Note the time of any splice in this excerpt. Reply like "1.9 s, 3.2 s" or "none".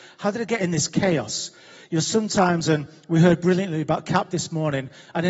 none